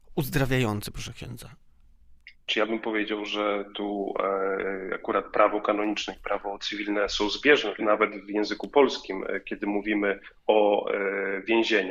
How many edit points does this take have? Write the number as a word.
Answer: one